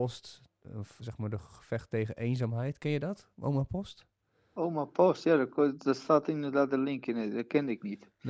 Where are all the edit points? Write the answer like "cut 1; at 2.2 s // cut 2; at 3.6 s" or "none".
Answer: cut 1; at 1.0 s